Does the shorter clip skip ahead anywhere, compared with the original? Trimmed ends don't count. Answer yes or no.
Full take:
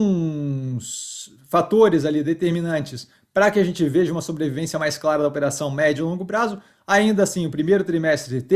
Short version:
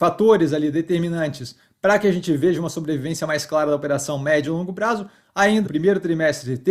yes